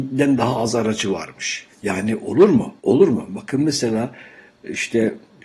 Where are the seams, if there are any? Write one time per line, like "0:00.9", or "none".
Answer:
0:02.8